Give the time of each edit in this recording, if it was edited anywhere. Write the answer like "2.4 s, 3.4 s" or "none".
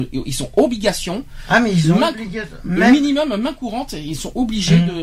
none